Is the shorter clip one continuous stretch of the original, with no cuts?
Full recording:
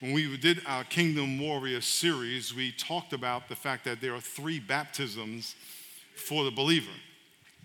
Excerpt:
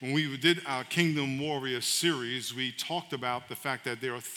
yes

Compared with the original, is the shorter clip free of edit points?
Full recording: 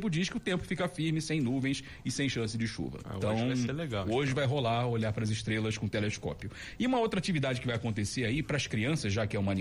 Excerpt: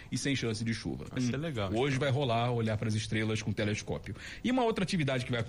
no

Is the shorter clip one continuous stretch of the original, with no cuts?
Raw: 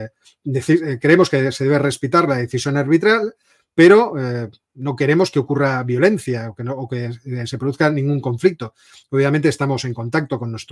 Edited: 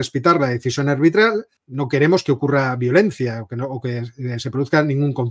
no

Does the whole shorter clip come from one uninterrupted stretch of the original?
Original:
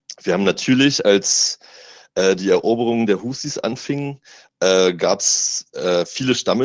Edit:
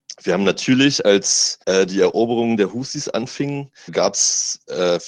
no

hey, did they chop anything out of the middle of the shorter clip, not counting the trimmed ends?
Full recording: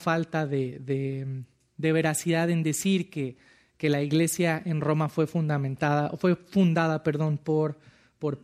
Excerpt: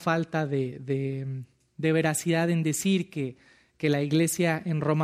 no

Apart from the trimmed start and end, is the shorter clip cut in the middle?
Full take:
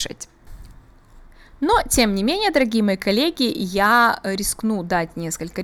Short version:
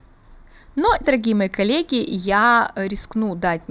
yes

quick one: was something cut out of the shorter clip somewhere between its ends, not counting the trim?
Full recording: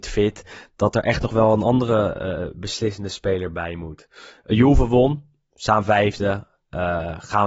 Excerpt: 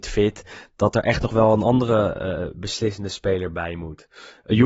no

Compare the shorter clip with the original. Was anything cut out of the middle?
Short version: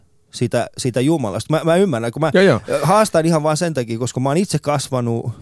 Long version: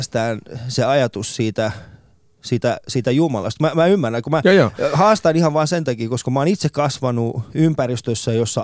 no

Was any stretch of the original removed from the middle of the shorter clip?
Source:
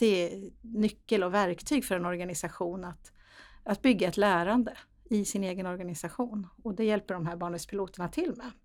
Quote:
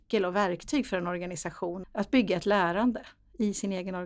yes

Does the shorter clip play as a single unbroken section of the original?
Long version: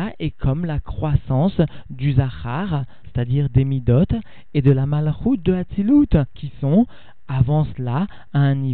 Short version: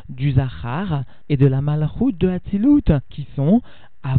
no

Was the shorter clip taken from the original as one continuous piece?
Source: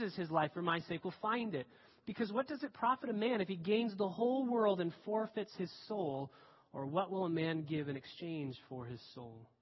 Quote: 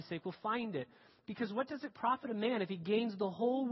yes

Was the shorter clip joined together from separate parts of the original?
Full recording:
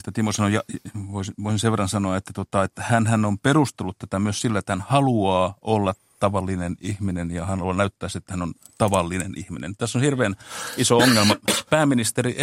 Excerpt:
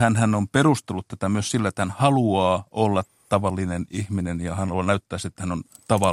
no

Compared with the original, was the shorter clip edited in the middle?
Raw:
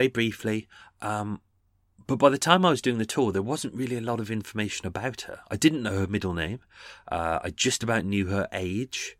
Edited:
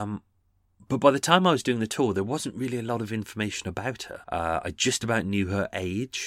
yes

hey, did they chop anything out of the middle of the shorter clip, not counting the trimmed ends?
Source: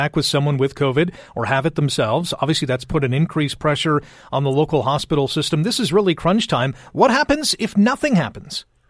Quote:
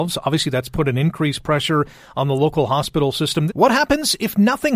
yes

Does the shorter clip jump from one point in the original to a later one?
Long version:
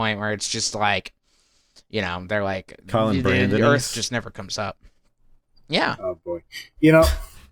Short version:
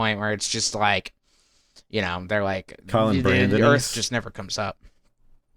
no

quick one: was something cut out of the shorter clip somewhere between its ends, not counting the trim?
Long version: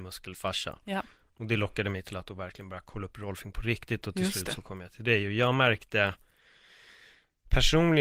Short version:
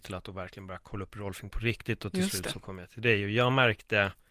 no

